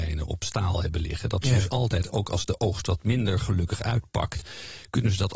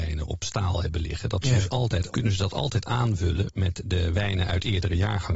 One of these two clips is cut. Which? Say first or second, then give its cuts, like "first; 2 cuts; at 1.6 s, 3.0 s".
second; 1 cut; at 2.1 s